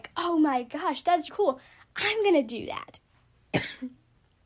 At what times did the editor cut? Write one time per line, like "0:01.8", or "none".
0:01.3